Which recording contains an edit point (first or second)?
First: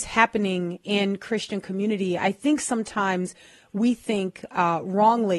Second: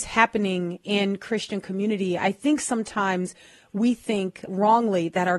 second